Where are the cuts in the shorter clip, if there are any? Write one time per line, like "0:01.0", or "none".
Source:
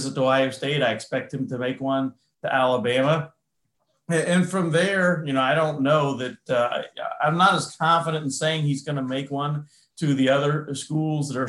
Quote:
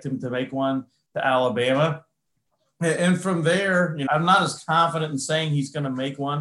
0:04.1